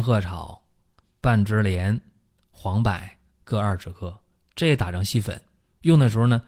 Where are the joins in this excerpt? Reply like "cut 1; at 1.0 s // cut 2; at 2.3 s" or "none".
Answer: cut 1; at 1.0 s